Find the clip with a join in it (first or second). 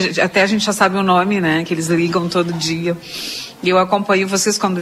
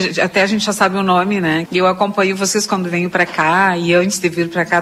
second